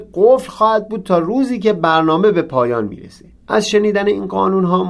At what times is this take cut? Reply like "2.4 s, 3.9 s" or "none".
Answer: 3.4 s